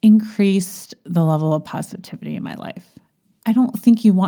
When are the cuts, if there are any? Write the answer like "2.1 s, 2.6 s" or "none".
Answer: 3.3 s